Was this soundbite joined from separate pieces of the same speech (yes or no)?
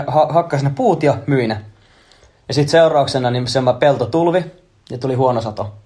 no